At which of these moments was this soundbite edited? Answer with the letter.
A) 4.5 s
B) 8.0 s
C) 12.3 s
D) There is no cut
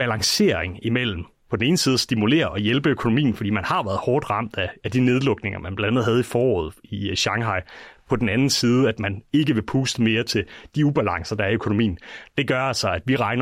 D